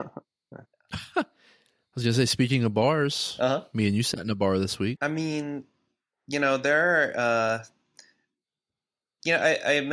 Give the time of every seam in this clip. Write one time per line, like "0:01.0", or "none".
0:05.0